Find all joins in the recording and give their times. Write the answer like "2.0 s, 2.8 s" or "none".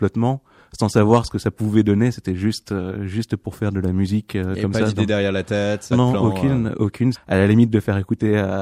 5.9 s, 7.1 s